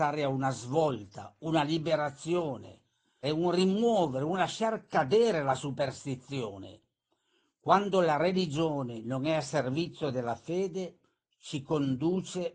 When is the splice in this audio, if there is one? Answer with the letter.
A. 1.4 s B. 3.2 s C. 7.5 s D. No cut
B